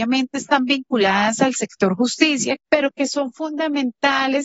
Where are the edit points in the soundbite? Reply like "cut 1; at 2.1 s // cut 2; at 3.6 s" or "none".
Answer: cut 1; at 2.6 s